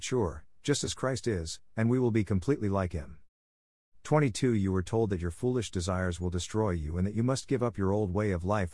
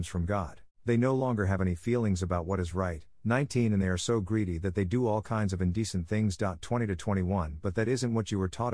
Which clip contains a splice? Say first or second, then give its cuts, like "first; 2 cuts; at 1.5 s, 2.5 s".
first; 1 cut; at 3.9 s